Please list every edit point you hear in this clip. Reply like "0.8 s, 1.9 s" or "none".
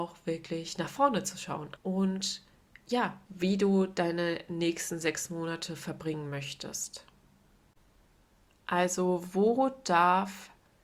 1.8 s, 3.3 s